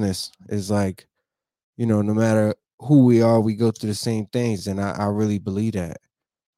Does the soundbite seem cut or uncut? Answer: uncut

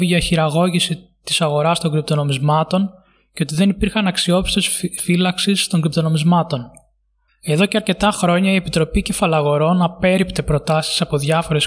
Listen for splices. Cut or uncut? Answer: cut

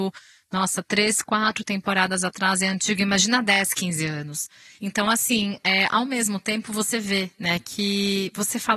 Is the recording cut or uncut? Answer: cut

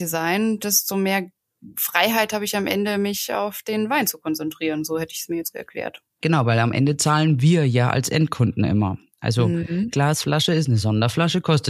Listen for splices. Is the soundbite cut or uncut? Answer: cut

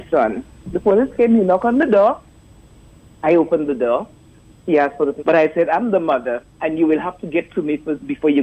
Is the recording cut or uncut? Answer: cut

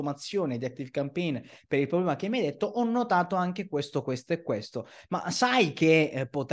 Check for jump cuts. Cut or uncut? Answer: uncut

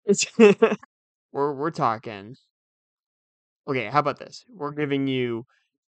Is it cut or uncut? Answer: cut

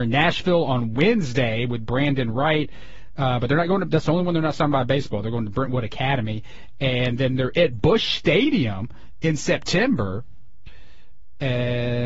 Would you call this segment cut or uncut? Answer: uncut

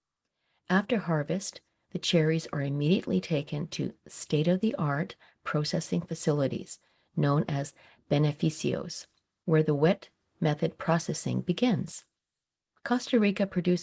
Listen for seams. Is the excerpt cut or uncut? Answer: cut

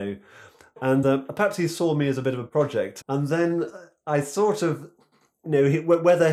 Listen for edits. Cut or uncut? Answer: cut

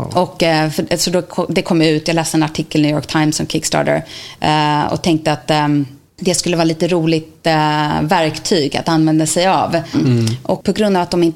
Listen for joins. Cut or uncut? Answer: cut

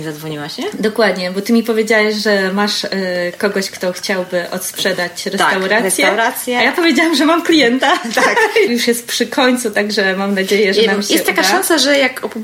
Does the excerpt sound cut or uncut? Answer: cut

